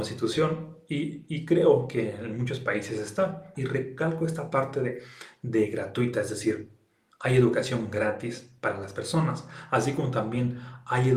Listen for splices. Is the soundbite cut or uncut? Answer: cut